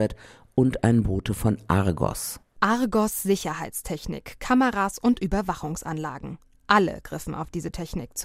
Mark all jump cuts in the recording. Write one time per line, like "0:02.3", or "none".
none